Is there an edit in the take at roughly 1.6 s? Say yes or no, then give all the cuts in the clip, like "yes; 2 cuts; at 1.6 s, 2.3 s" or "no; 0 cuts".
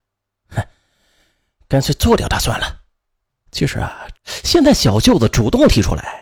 no; 1 cut; at 4.2 s